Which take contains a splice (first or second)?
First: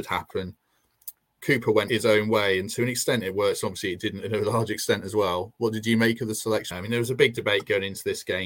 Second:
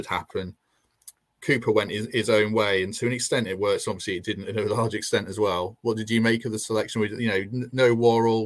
first